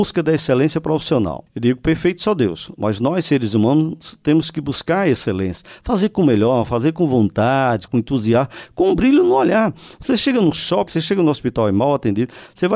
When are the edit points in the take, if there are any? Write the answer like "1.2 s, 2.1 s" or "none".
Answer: 7.9 s, 10.9 s